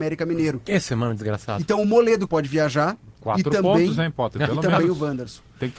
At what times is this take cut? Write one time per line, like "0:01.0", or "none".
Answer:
0:02.3